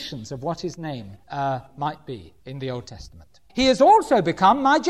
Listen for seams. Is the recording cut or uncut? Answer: cut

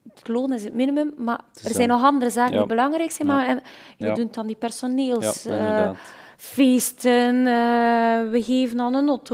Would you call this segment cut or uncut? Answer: cut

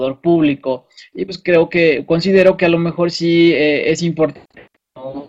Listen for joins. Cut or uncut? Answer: uncut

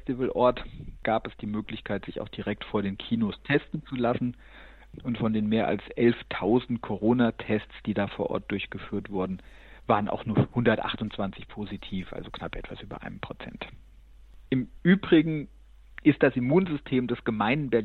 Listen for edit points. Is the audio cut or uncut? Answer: uncut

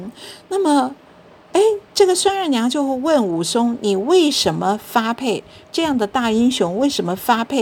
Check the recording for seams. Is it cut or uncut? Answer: uncut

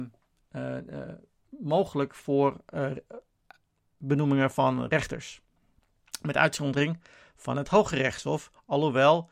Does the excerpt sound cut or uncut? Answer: uncut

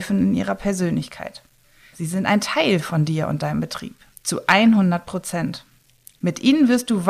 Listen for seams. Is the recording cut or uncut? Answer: cut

